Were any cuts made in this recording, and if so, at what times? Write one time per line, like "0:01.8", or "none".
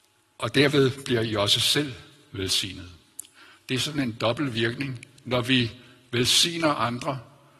none